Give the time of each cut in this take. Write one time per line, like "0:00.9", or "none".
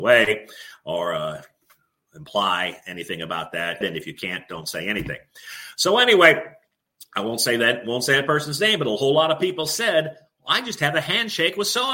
0:03.8

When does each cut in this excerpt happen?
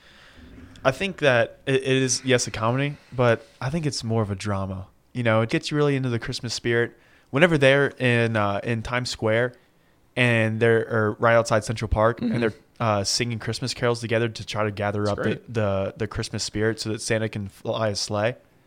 0:05.5

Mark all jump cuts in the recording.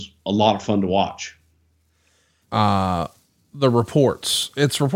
0:02.4

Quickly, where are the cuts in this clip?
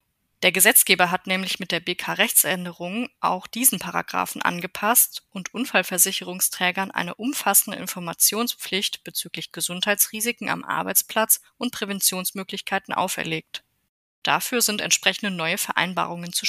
0:14.1

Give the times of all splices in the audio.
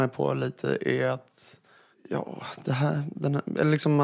none

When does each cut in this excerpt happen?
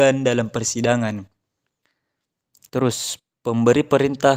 0:03.3

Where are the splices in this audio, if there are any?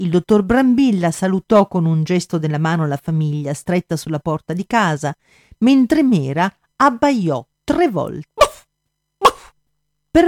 0:08.3

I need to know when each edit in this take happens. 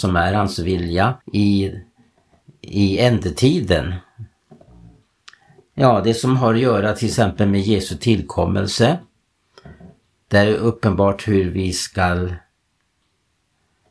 0:01.2

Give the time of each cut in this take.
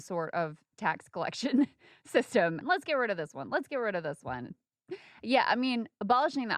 0:02.6
0:04.5

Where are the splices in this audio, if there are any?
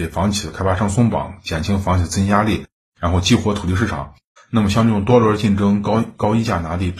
0:04.4

